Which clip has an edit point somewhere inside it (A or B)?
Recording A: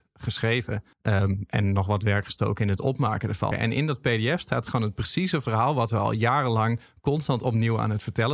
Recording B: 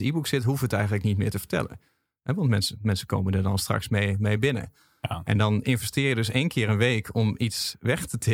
A